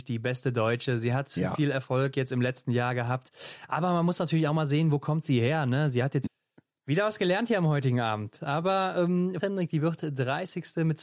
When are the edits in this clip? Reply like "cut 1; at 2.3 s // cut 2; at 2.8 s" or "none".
cut 1; at 6.3 s // cut 2; at 9.4 s